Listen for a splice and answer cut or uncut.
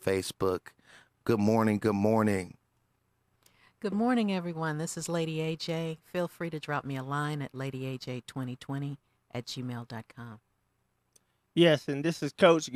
uncut